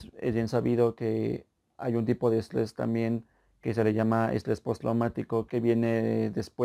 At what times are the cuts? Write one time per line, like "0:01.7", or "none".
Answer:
0:05.5